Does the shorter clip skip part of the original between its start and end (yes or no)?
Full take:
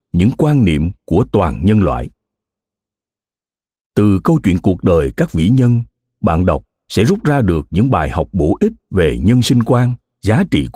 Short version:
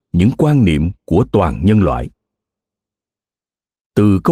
no